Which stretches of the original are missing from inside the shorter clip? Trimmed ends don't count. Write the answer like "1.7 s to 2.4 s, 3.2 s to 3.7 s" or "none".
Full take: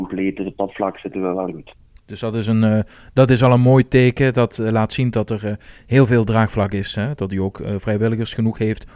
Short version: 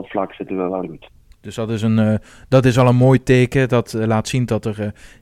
none